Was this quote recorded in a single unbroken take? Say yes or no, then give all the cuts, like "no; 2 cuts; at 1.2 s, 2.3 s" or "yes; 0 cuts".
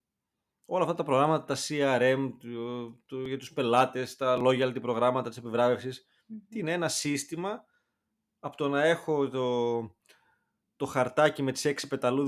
yes; 0 cuts